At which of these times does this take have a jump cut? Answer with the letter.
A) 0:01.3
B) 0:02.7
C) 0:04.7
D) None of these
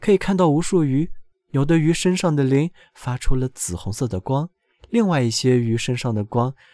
A